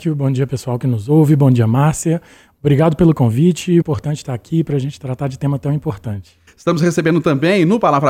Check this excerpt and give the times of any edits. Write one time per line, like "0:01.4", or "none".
0:03.8
0:06.5